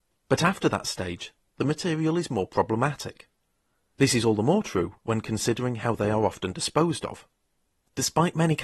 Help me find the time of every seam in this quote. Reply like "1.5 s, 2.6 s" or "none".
none